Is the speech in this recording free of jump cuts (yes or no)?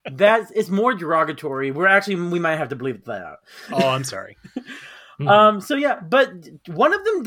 yes